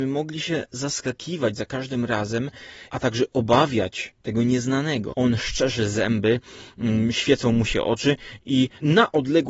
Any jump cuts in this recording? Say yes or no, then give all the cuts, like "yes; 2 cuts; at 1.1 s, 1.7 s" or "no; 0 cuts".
yes; 1 cut; at 5.1 s